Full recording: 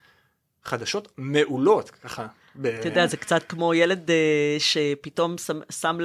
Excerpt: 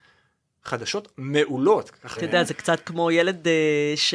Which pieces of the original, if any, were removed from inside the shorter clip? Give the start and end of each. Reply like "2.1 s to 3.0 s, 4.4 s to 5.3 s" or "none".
2.2 s to 2.8 s